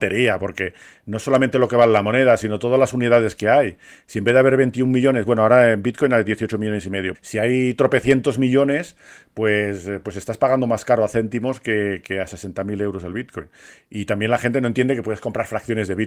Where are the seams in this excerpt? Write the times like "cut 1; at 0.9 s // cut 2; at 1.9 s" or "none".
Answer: cut 1; at 7.1 s